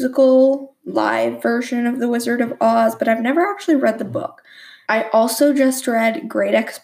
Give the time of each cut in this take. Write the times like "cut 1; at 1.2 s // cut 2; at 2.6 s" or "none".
cut 1; at 4.8 s